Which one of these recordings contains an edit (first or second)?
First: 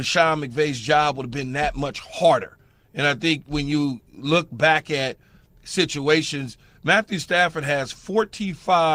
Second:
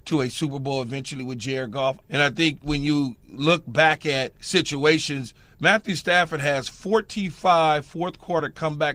second